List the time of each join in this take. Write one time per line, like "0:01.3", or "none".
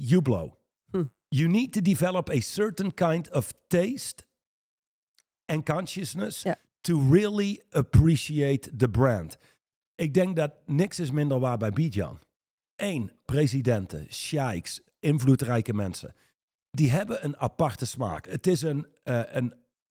0:13.2
0:18.2